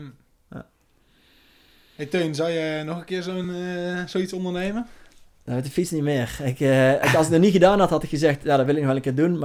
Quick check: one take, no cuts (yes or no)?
yes